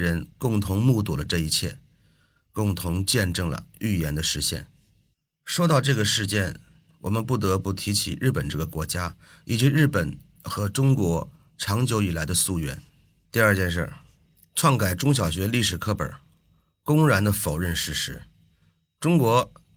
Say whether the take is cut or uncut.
cut